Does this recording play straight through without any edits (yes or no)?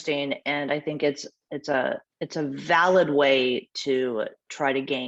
no